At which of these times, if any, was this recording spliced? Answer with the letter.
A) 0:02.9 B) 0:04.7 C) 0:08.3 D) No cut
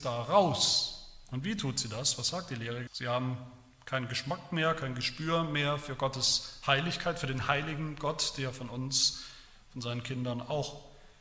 A